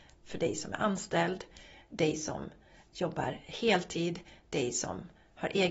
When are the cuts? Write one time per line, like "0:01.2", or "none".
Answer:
none